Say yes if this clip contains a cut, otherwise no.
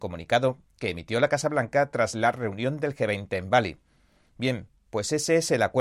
no